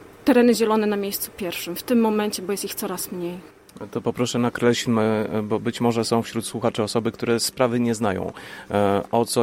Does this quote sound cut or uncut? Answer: uncut